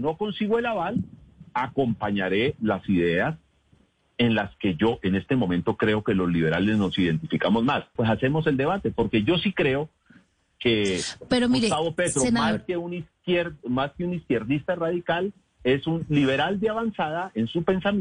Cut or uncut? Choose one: cut